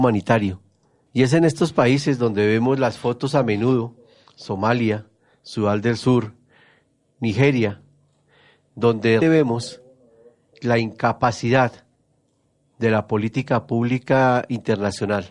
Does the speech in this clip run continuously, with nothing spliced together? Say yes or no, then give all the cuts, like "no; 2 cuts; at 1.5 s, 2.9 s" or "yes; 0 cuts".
no; 2 cuts; at 1.1 s, 9.2 s